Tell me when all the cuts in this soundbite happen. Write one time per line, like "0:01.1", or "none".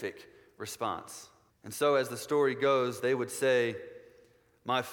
0:01.5

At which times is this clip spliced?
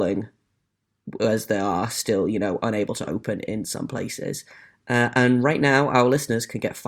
none

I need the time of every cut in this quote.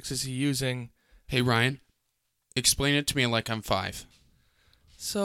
0:01.2

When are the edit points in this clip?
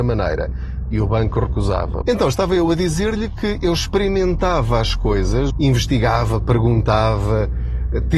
0:02.0
0:05.5

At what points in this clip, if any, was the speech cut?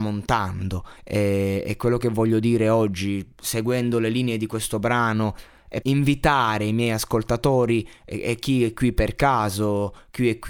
0:01.0
0:05.8

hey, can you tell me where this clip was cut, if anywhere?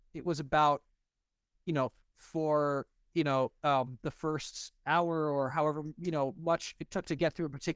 0:02.1

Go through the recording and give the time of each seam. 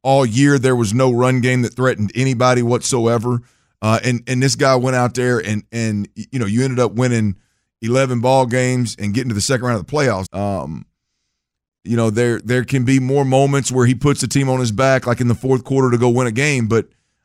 0:10.3
0:12.4

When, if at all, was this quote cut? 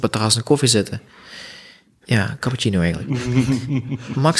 0:02.0

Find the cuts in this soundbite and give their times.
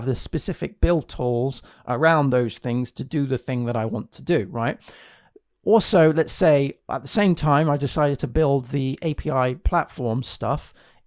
none

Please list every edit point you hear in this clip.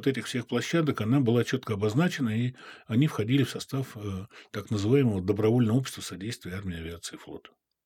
none

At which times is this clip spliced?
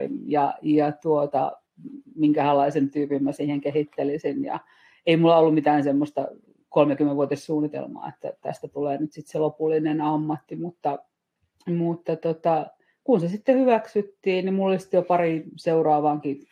none

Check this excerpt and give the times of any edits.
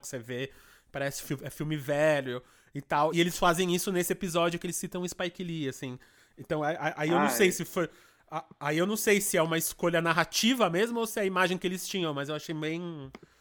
none

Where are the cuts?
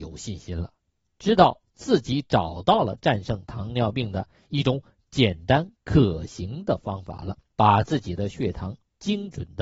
0:07.5

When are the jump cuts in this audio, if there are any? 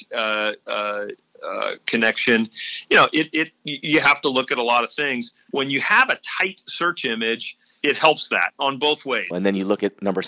0:09.3

